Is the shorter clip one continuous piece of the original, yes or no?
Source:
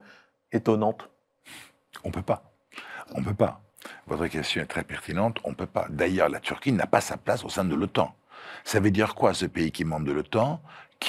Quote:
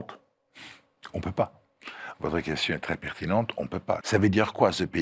no